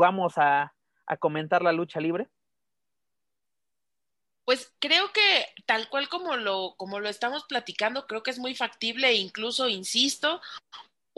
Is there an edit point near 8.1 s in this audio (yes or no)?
yes